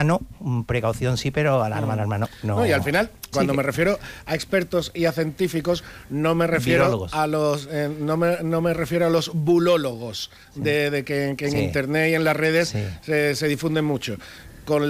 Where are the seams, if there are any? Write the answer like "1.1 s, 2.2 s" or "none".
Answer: 3.3 s